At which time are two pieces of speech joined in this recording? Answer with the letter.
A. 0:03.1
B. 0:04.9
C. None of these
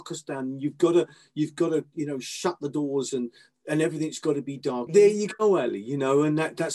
B